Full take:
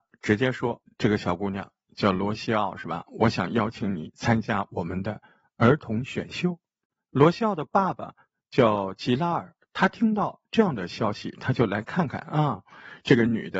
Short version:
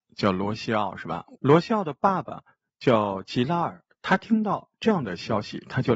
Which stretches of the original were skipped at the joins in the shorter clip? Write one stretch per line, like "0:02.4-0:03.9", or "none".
0:03.1-0:07.0